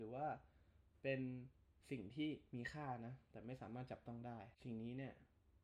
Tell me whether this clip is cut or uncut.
cut